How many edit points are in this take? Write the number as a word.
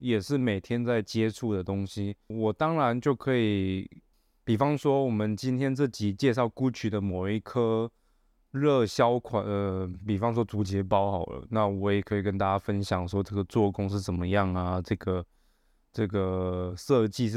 zero